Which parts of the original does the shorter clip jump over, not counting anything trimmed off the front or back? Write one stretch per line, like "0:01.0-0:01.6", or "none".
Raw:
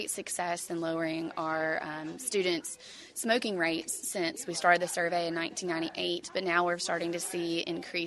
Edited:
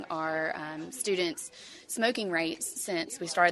none